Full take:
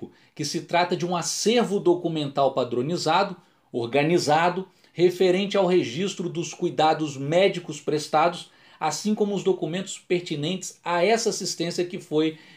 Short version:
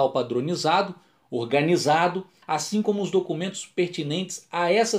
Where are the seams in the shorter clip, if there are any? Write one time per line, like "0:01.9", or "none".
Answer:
0:02.4